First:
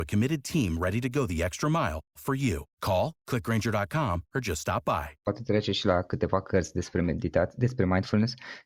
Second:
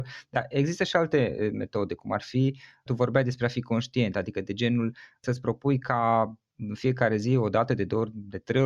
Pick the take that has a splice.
first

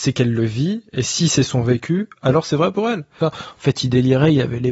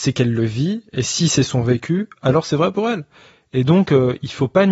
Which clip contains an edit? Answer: first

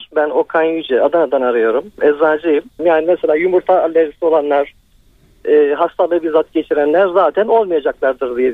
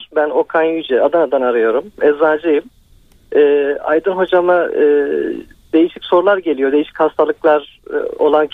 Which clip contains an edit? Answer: first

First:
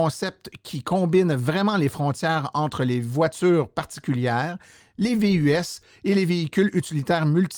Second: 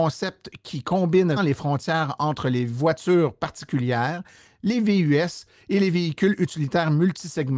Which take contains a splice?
second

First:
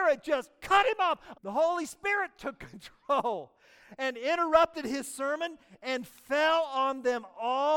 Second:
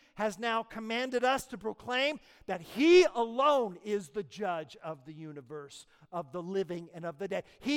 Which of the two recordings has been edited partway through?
first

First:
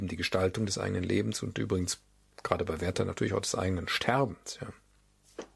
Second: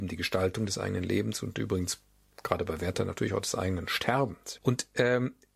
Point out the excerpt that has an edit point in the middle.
second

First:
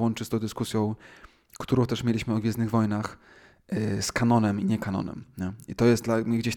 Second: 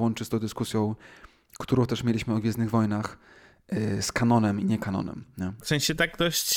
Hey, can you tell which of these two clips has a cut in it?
second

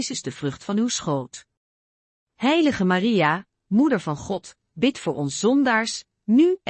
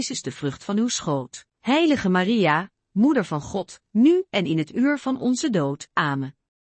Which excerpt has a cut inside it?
second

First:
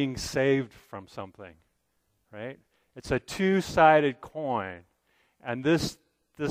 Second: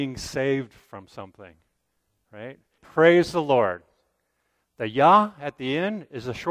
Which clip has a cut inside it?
second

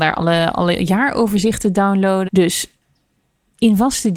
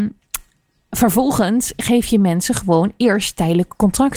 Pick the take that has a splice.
first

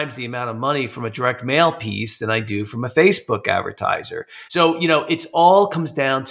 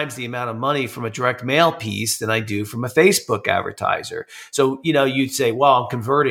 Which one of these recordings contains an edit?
first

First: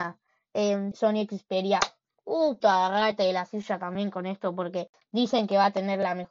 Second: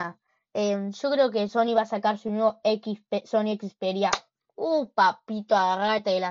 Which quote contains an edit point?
first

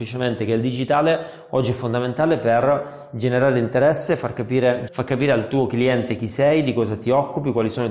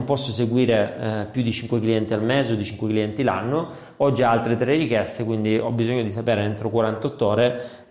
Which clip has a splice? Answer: first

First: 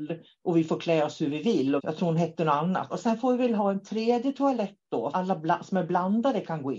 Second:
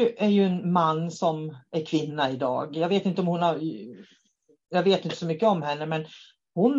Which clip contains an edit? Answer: first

